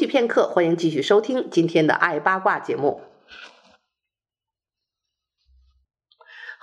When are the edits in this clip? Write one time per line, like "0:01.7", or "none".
none